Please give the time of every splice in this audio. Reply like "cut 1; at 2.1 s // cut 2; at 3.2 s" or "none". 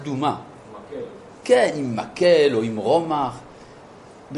none